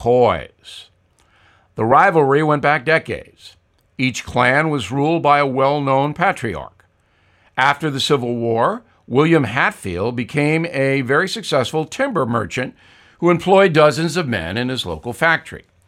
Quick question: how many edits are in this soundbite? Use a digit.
0